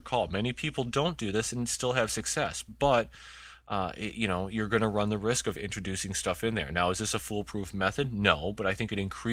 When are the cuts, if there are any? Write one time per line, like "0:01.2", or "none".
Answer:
none